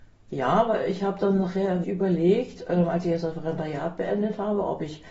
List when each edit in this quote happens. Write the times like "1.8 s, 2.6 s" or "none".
1.8 s